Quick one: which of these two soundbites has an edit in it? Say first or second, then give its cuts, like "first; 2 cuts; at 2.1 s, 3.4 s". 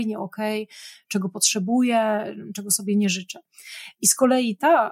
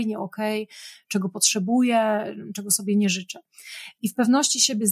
second; 1 cut; at 3.9 s